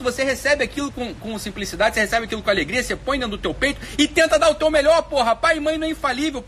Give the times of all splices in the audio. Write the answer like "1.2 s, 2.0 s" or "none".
none